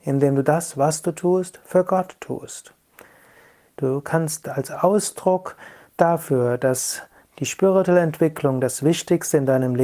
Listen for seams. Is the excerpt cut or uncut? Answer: cut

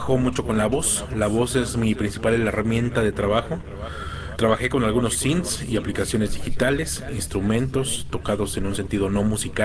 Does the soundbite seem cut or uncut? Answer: cut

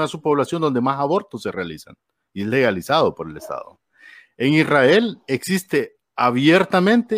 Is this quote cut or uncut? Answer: uncut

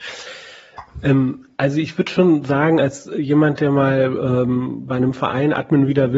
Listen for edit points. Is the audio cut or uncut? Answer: uncut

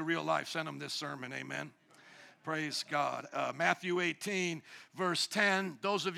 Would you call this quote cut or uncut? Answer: uncut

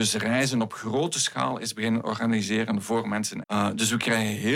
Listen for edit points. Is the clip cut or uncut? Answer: cut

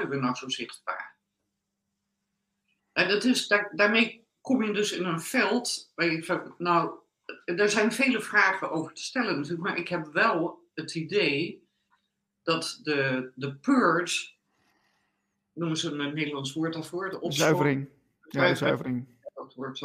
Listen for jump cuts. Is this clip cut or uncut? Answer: uncut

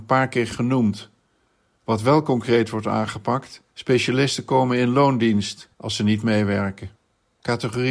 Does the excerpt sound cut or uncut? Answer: cut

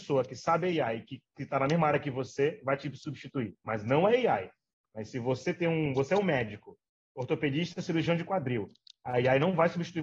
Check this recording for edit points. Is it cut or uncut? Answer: uncut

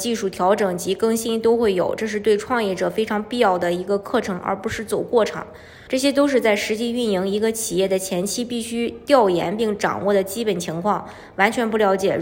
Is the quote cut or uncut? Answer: cut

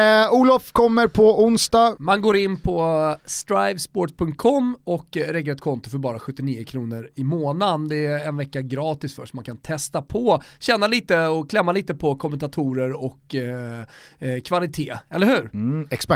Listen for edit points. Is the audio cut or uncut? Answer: cut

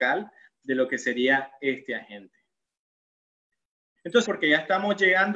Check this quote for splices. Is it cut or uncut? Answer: cut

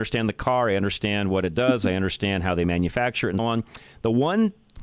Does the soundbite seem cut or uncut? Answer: cut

